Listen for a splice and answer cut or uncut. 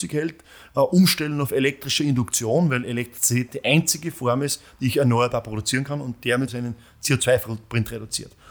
cut